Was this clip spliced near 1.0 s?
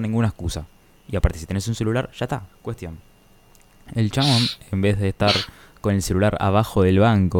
no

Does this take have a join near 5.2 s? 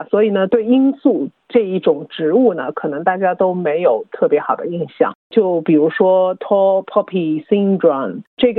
yes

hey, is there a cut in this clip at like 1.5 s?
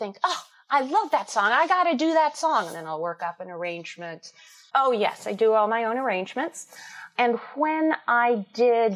no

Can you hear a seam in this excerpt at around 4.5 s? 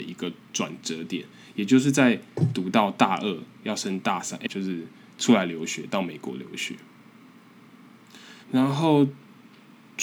yes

